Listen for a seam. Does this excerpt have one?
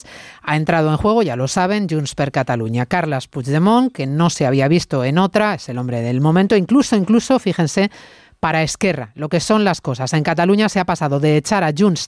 no; 0 cuts

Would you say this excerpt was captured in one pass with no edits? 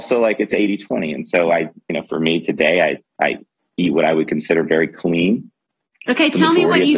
yes; 0 cuts

